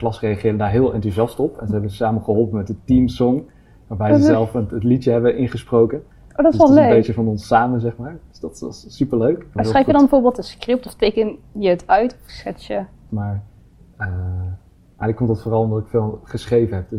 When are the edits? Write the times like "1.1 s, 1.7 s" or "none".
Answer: 9.6 s, 13.1 s

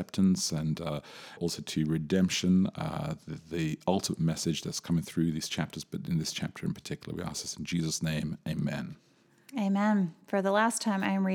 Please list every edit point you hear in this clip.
1.4 s

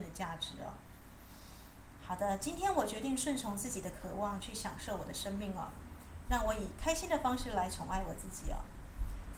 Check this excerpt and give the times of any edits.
none

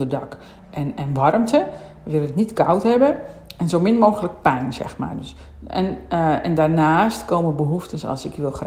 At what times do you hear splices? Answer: none

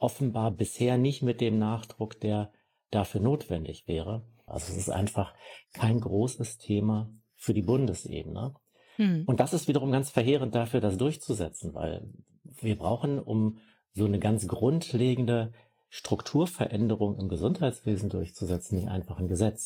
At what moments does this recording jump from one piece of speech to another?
4.5 s

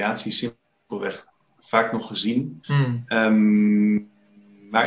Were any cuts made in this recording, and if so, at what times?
2.6 s

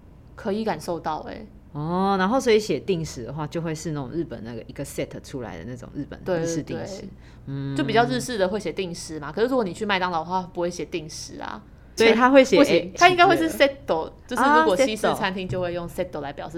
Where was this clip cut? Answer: 12.0 s

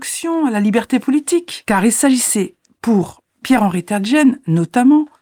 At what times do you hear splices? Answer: none

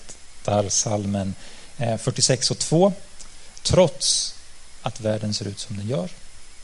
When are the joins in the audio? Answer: 3.5 s

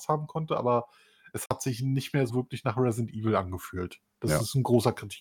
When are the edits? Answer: 2.3 s

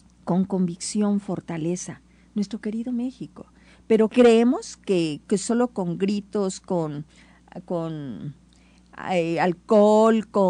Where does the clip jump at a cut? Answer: none

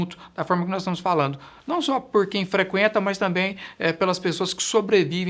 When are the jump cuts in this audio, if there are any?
1.6 s

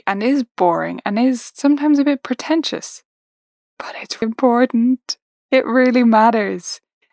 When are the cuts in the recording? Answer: 4.2 s

